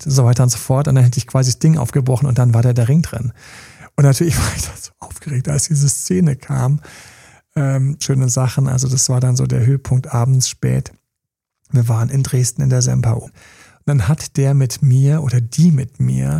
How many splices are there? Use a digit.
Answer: 2